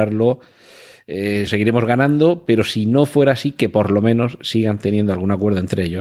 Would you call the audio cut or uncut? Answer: cut